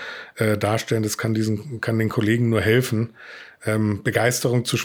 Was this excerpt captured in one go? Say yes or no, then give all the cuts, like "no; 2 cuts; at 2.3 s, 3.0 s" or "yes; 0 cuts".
yes; 0 cuts